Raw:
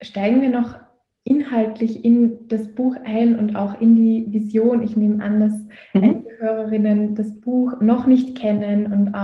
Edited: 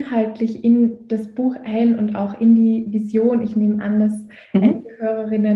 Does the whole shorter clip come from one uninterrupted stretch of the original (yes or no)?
yes